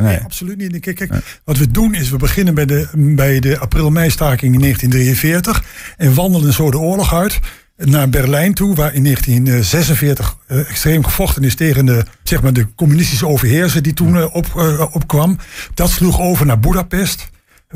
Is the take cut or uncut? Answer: cut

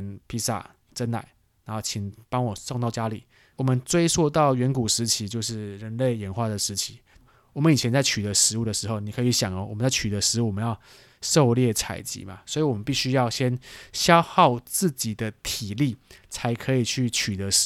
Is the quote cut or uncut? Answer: cut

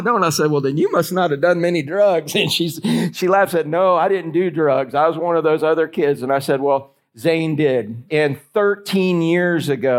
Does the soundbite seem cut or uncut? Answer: cut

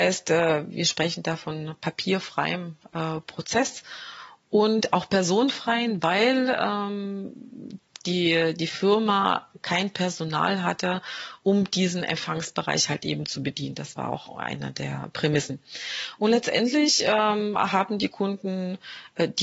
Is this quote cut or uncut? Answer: uncut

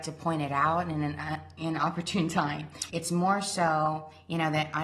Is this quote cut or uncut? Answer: cut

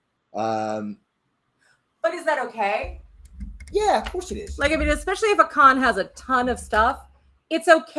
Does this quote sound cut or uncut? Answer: uncut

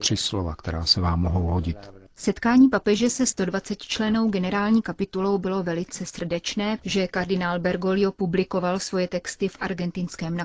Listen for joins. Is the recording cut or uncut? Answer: cut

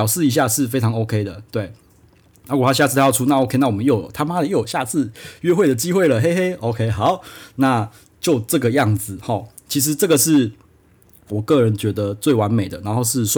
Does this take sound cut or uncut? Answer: uncut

